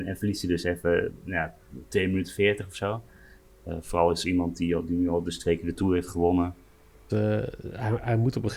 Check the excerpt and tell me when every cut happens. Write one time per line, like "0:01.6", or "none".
0:03.5
0:07.1